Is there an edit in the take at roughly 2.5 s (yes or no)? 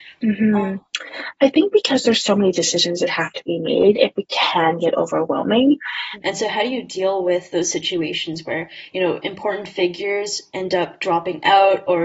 no